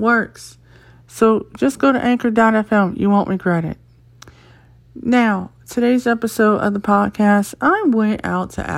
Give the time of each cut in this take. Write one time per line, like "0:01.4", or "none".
none